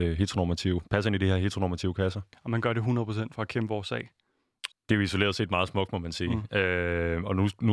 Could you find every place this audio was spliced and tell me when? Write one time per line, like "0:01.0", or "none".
0:04.7